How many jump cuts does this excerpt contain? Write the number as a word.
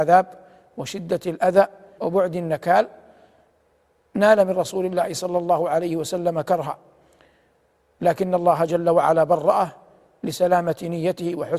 one